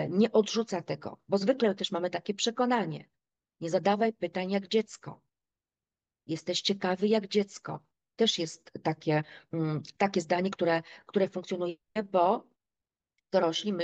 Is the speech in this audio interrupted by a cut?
no; 0 cuts

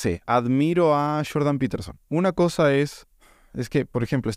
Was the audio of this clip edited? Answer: yes; 1 cut; at 2.0 s

